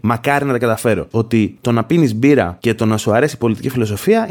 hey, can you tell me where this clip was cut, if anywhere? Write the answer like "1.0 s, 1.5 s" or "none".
1.1 s